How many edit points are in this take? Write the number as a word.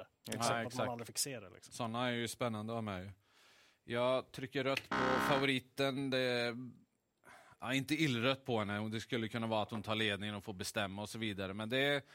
zero